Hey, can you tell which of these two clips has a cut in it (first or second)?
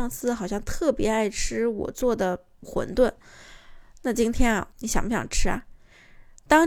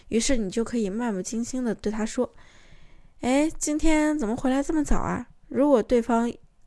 first